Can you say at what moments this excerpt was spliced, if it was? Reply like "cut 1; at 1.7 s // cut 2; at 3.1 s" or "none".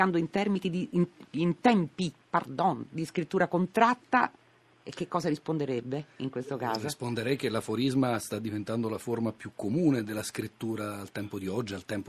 none